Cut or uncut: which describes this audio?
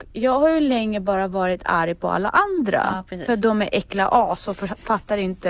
uncut